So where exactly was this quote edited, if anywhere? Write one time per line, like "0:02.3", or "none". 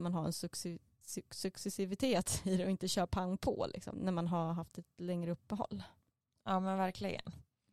0:03.9